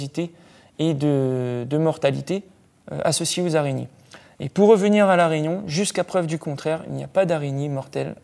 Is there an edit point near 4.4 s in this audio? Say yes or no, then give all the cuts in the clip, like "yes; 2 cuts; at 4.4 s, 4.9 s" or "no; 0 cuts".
no; 0 cuts